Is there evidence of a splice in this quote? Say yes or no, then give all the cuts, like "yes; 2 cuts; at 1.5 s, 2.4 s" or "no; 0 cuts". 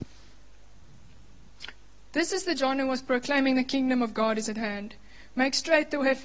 yes; 1 cut; at 2.1 s